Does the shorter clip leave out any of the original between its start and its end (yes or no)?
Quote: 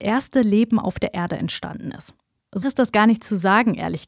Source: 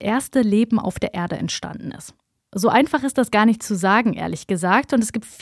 yes